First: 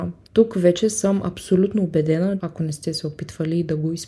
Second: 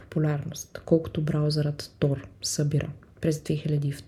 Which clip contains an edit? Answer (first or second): first